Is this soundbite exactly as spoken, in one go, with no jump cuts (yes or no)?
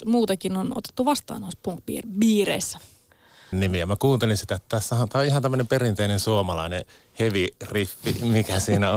no